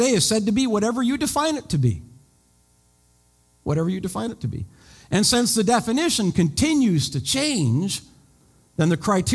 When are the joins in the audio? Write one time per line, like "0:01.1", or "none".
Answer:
none